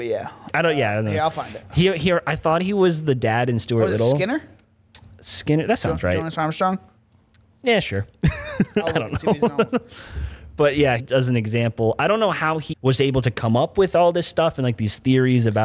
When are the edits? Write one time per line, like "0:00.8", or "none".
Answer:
0:11.0
0:12.7

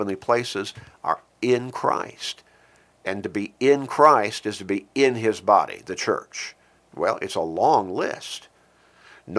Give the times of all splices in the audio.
0:06.8

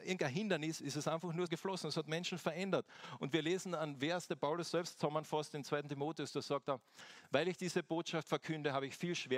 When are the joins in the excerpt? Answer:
0:01.5

